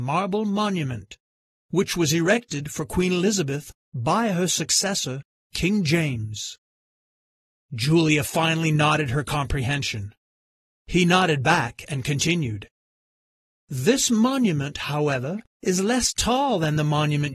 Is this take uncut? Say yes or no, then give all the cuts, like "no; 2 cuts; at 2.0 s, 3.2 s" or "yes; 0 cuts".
yes; 0 cuts